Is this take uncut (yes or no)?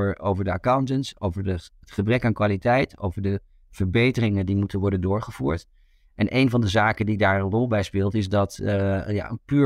yes